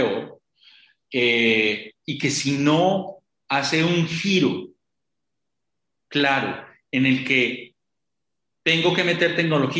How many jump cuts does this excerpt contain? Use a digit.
0